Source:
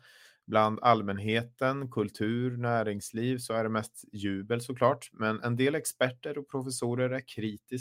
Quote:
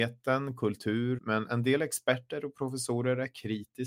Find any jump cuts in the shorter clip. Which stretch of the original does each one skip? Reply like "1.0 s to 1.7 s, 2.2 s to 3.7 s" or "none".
2.5 s to 5.1 s